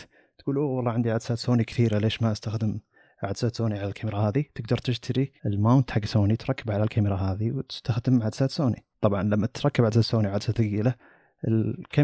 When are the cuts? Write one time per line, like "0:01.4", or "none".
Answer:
0:05.4
0:08.9

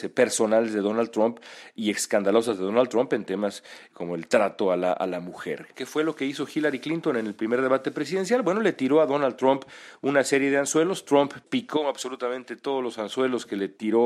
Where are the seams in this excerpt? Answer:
0:05.7

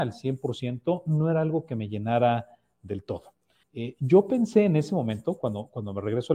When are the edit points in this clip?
0:03.6

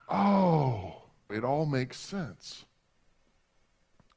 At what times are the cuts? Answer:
0:01.3

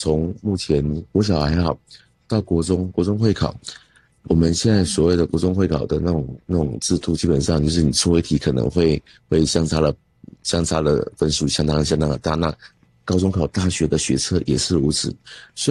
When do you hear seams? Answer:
none

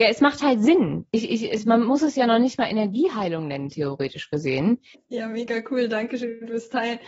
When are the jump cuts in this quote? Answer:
0:04.9

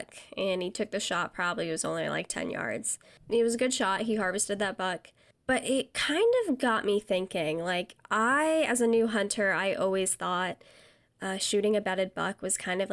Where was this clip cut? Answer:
none

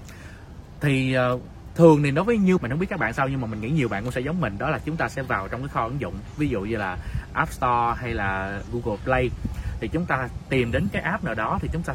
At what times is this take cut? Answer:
0:02.6
0:08.7

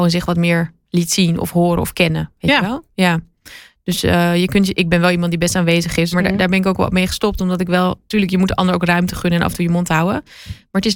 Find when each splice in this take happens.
0:04.7
0:06.1

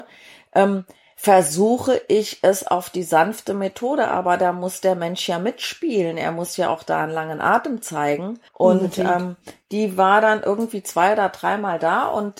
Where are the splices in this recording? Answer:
0:08.5

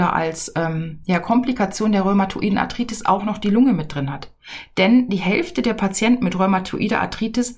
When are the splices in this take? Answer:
none

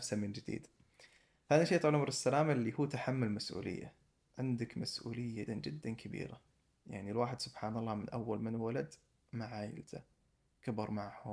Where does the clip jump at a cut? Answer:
0:05.5

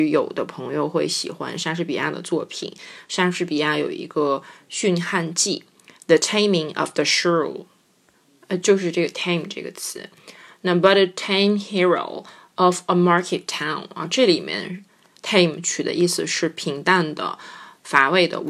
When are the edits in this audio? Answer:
none

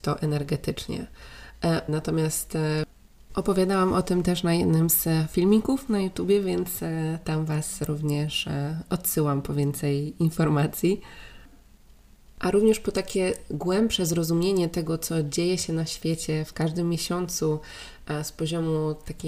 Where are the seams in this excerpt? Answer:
0:01.9

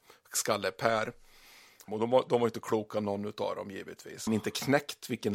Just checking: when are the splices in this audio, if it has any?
0:01.9
0:04.3

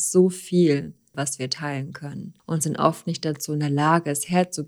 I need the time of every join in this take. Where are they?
0:01.1
0:02.4

